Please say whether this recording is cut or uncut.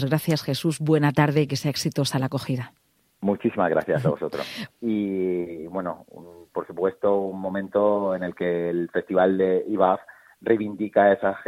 cut